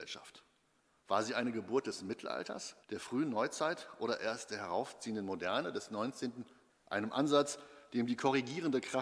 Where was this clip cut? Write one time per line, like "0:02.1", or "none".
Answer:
0:02.8
0:06.7